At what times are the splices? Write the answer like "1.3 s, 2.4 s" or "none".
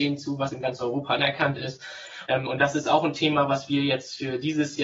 2.3 s